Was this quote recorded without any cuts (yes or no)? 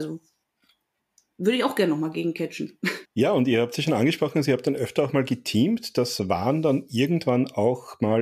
no